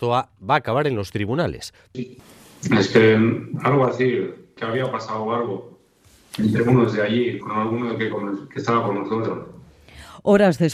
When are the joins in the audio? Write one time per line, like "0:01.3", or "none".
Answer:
0:01.9
0:04.6
0:07.4